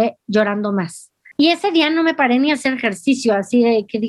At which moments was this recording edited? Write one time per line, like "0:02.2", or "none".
0:01.3